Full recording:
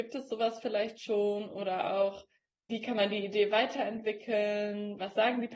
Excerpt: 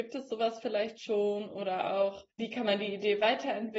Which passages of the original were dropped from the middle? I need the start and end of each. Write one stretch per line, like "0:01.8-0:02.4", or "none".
0:02.3-0:02.6